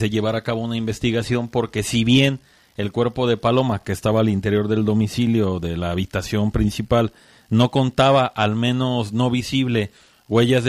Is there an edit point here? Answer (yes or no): no